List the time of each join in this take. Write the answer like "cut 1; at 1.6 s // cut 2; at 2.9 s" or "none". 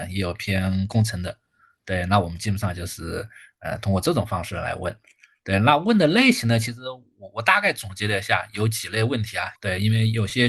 cut 1; at 9.6 s